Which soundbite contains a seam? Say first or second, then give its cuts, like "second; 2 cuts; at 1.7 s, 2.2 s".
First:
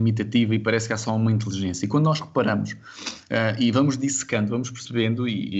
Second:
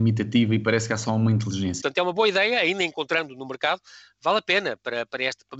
second; 1 cut; at 1.8 s